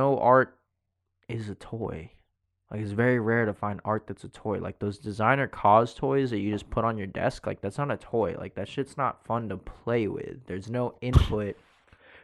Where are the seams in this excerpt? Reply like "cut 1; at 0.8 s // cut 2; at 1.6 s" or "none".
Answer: none